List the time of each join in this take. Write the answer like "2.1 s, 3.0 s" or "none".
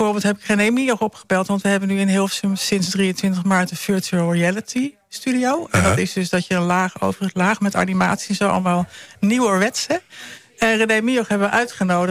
none